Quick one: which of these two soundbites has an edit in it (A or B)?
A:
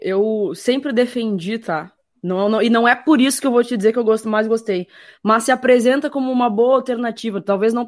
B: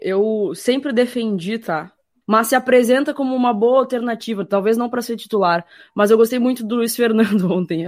B